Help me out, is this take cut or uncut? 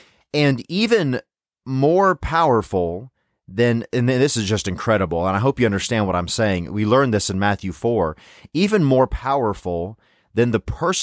uncut